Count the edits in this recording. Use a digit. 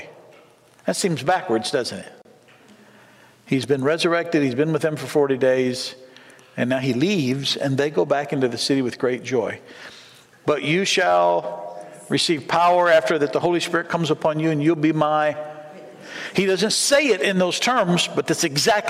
1